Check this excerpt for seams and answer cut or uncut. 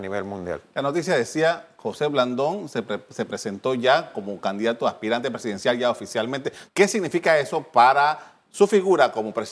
cut